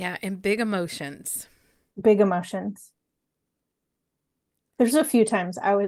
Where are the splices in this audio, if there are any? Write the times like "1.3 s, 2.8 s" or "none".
none